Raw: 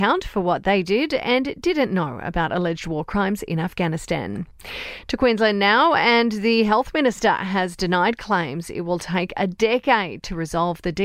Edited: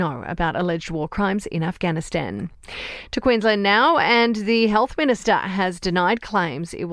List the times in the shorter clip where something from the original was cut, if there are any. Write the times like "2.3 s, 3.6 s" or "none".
none